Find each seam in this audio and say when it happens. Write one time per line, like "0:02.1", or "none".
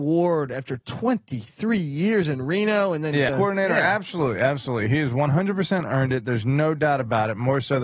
0:03.3